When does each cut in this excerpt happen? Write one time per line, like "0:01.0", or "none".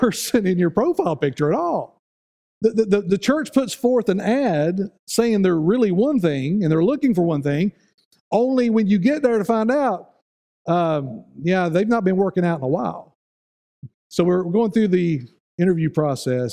0:02.5
0:13.9

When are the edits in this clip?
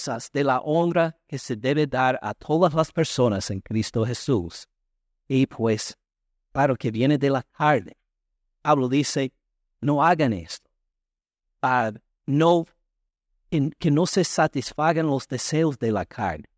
none

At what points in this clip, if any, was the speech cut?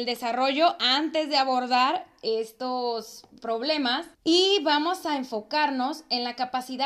0:04.1

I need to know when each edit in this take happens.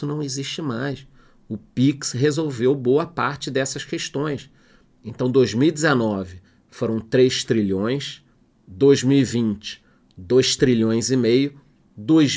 none

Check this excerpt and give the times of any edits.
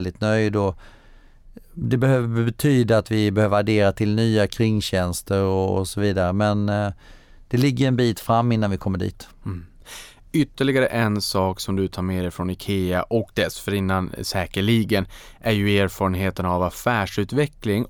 none

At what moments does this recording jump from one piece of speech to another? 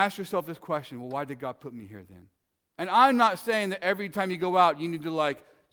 0:02.7

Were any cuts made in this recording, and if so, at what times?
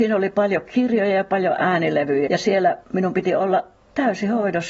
0:02.3

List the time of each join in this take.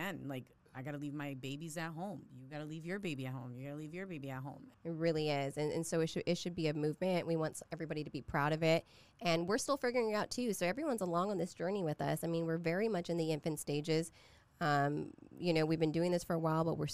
0:04.7

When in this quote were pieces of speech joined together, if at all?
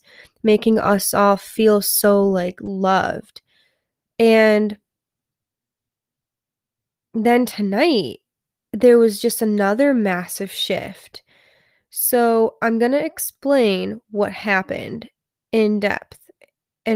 none

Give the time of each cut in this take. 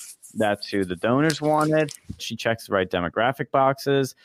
0:02.2

